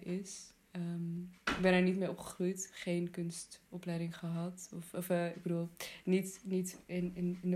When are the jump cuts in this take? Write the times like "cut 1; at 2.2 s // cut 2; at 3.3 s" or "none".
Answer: none